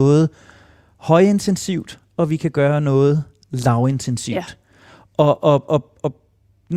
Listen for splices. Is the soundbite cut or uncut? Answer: uncut